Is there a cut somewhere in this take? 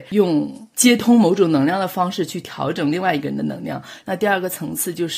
yes; 1 cut; at 4.0 s

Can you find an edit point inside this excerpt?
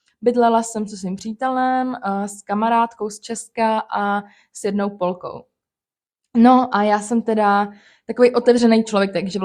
no; 0 cuts

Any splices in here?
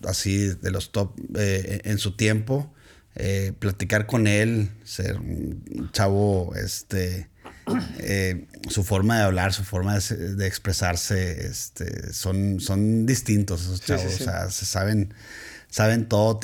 no; 0 cuts

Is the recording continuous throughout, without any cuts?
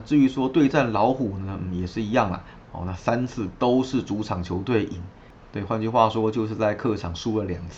no; 1 cut; at 2.6 s

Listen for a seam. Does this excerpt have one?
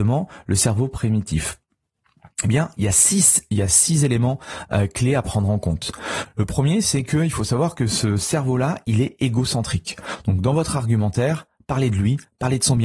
no; 0 cuts

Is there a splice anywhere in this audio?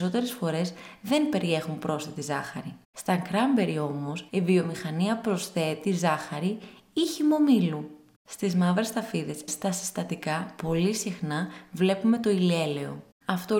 yes; 2 cuts; at 4.3 s, 9.5 s

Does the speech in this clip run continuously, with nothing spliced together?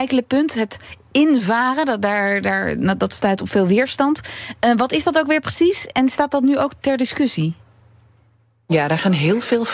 yes; 0 cuts

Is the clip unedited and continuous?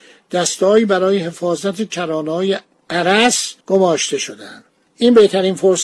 no; 1 cut; at 3.6 s

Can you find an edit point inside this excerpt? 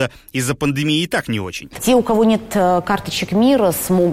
yes; 1 cut; at 1.7 s

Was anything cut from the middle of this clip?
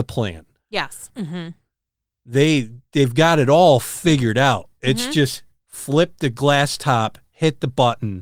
yes; 1 cut; at 1.1 s

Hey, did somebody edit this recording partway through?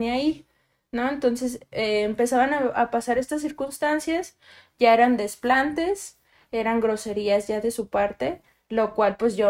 no; 0 cuts

